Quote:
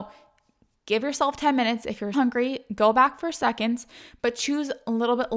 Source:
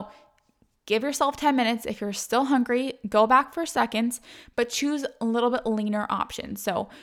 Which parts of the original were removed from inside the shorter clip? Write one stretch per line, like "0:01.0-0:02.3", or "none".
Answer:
0:02.1-0:02.5